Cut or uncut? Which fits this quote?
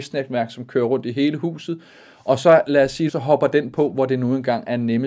cut